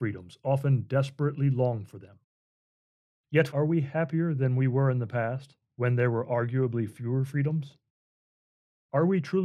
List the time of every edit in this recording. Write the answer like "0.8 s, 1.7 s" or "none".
3.5 s